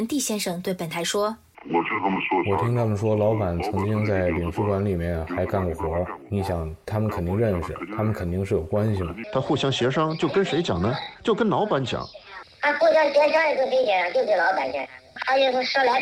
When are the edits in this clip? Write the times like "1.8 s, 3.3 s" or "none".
9.2 s, 12.4 s